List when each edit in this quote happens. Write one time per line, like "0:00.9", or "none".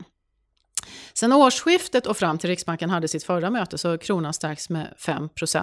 none